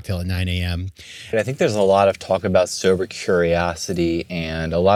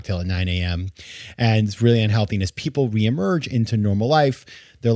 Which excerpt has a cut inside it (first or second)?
first